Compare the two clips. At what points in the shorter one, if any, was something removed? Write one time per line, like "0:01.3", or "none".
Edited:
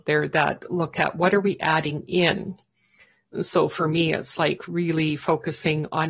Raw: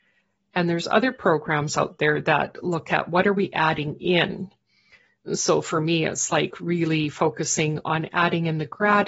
none